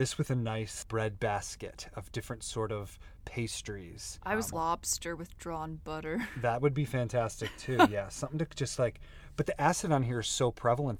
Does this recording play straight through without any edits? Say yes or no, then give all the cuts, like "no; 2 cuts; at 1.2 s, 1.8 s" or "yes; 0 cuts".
no; 1 cut; at 4.5 s